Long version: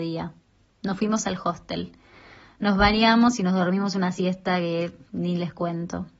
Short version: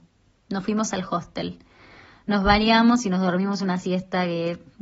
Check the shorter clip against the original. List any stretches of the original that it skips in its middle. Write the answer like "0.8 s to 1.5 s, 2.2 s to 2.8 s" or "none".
none